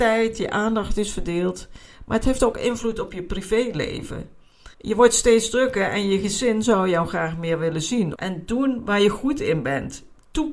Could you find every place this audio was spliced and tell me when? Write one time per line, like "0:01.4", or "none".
0:04.7
0:08.1